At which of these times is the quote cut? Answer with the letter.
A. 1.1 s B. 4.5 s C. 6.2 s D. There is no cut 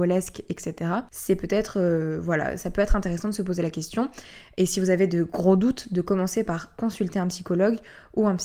D